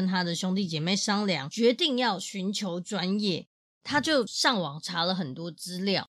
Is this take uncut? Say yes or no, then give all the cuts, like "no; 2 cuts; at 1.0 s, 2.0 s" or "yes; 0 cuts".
yes; 0 cuts